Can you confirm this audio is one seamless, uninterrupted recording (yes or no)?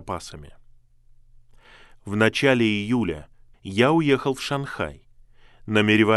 no